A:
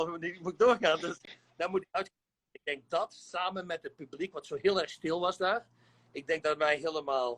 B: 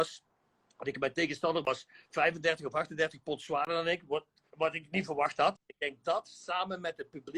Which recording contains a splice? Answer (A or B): B